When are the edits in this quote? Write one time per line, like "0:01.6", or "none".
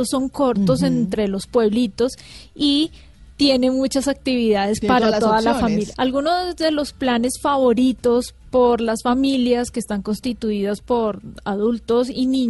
0:05.9